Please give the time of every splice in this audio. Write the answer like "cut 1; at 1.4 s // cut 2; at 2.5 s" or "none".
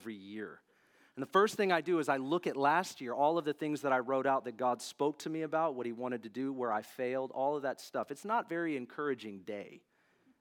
none